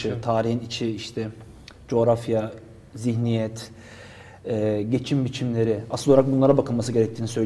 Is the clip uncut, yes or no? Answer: yes